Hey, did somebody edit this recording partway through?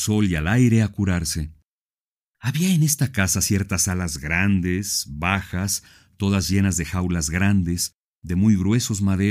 yes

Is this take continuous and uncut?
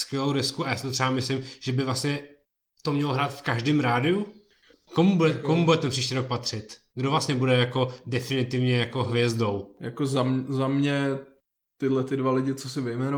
yes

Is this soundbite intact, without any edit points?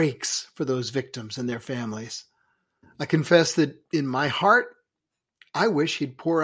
no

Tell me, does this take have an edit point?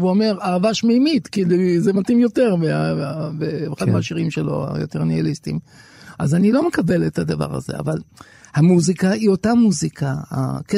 no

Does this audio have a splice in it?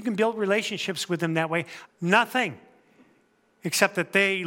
yes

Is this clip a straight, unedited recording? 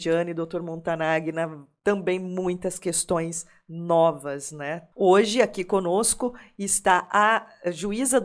no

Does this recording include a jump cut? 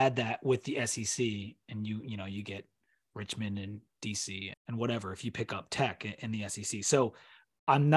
yes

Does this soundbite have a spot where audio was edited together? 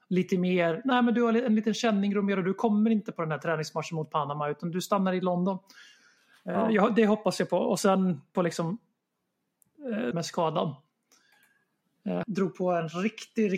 yes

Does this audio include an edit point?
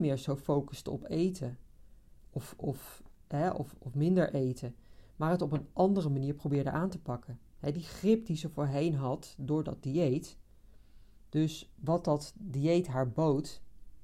no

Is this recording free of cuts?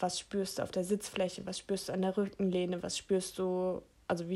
yes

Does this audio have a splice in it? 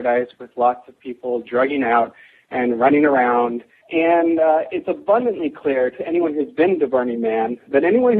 yes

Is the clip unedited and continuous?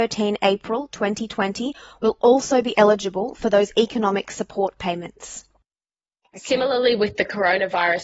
yes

